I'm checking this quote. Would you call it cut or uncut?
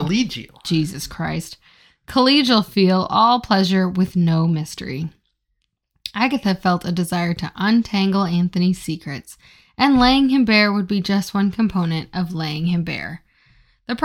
uncut